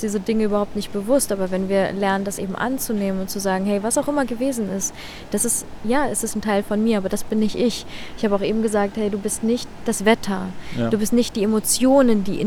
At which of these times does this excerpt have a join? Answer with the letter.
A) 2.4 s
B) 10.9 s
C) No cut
C